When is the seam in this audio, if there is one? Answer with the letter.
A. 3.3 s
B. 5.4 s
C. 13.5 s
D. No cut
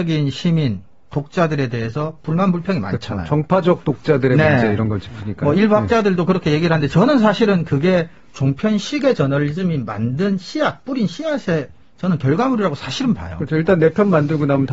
D